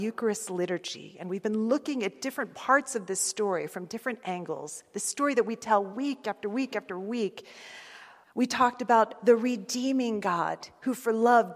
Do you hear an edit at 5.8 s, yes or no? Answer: no